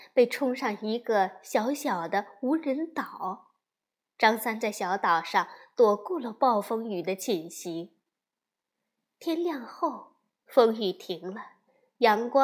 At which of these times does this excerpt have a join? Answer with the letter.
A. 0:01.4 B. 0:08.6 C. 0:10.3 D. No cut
D